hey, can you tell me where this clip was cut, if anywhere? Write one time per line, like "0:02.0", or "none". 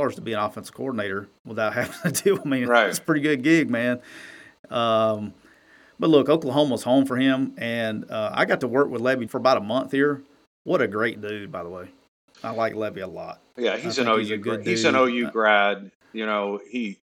0:09.3

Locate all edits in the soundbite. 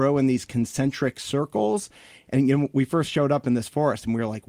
none

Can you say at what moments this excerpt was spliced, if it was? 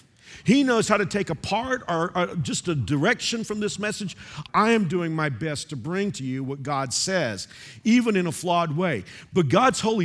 0:04.5

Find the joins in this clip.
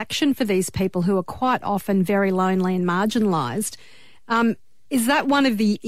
none

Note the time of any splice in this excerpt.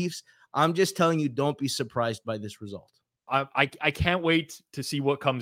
0:03.3

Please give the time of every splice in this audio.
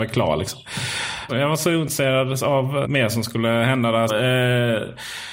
0:01.3
0:02.8
0:04.1

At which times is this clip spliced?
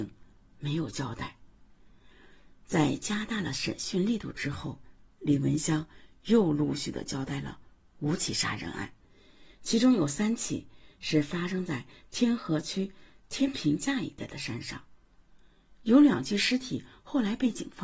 none

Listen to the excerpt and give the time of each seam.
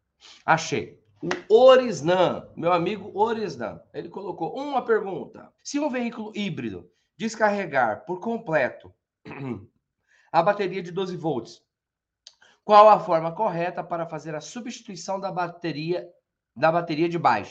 0:05.6

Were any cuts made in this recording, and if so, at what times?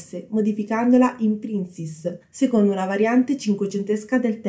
0:02.2

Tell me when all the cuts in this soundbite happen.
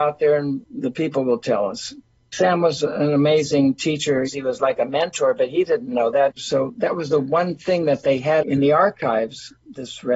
0:04.3
0:06.4

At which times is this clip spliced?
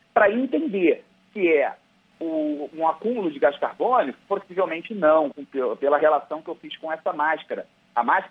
0:05.3

